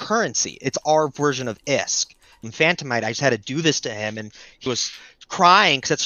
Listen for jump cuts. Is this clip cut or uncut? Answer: cut